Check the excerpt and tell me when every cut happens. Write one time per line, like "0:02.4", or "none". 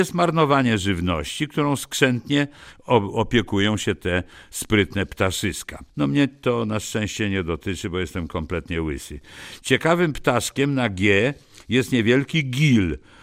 0:05.9